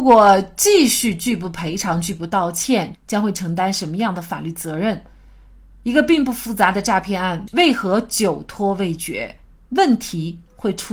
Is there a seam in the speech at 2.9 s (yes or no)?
yes